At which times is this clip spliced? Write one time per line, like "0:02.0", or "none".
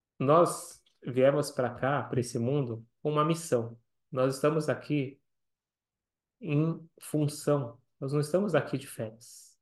none